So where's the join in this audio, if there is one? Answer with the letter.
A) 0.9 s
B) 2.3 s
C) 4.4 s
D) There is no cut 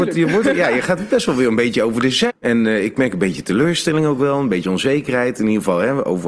B